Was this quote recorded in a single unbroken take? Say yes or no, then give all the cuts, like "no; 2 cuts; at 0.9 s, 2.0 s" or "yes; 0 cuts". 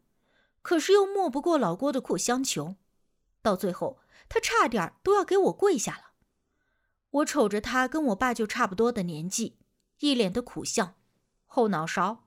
no; 1 cut; at 2.0 s